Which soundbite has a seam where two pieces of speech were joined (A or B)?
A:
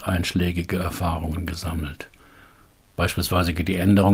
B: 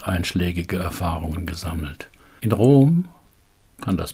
B